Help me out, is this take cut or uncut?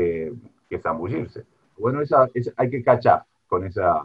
cut